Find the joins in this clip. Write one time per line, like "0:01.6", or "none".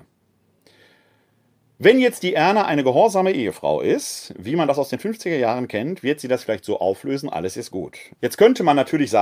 0:08.2